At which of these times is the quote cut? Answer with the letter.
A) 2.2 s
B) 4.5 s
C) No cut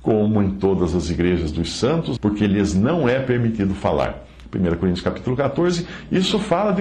A